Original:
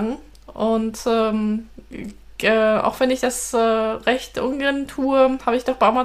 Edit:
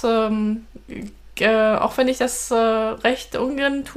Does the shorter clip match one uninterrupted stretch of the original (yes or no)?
yes